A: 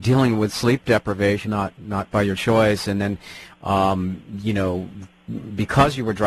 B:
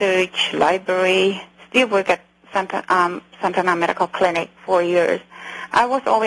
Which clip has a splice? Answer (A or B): A